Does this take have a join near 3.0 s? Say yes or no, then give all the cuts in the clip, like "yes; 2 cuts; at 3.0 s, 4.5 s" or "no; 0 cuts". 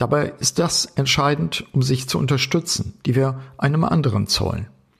yes; 1 cut; at 3.0 s